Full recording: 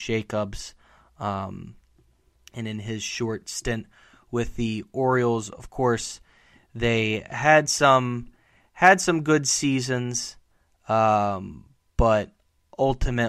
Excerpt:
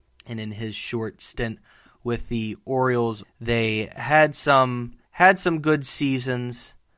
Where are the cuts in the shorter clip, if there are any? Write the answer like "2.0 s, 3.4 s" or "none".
3.2 s, 5.0 s